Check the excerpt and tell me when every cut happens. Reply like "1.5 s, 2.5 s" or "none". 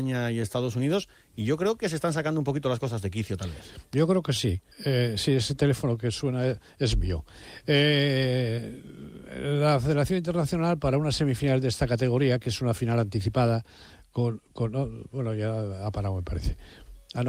4.7 s